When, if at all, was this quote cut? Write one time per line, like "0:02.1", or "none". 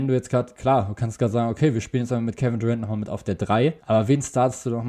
0:03.8